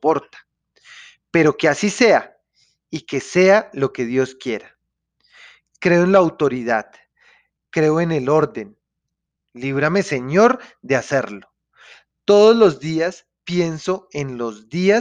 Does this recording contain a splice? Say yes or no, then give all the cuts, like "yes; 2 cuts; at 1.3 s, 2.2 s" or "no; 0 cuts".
yes; 1 cut; at 9.4 s